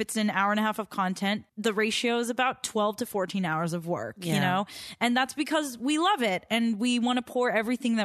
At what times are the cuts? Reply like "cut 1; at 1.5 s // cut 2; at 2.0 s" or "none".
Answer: cut 1; at 1.5 s